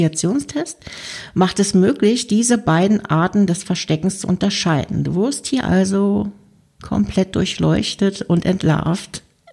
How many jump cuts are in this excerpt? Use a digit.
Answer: 0